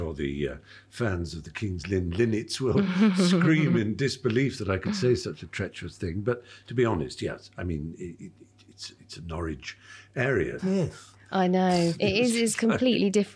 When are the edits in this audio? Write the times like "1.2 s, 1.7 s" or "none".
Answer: 10.6 s, 11.9 s